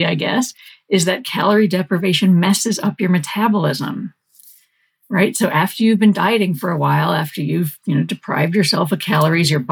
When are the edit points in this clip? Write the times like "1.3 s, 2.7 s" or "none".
none